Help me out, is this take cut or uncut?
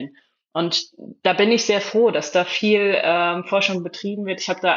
uncut